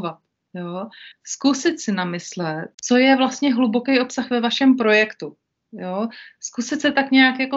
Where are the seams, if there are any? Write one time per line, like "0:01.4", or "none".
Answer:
0:01.1
0:02.7